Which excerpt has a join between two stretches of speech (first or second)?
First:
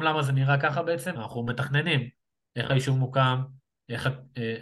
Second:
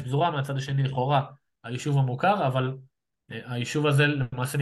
first